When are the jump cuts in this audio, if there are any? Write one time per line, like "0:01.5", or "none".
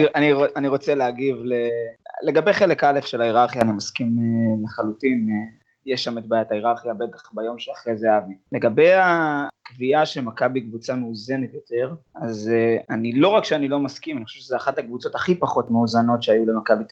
none